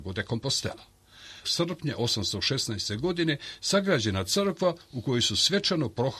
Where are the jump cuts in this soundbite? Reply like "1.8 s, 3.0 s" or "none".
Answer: 1.4 s